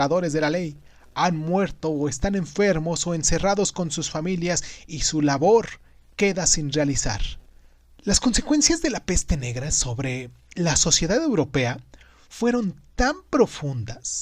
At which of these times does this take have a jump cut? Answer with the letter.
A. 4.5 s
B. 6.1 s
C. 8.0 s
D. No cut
C